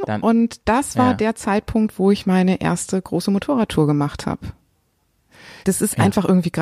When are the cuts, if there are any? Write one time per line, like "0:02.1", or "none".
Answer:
0:05.6